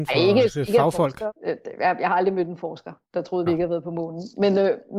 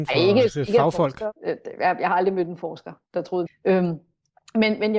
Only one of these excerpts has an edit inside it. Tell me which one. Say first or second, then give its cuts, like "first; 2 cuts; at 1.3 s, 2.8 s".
second; 1 cut; at 3.5 s